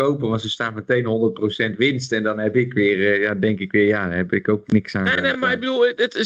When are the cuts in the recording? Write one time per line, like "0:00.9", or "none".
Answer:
none